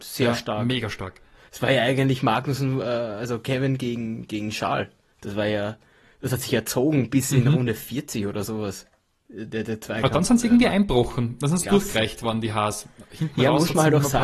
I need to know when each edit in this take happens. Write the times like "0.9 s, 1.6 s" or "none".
none

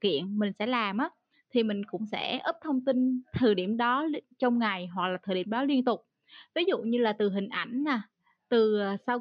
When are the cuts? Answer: none

